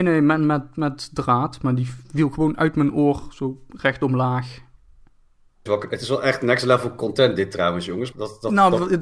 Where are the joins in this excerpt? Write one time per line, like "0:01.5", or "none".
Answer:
0:05.7
0:08.1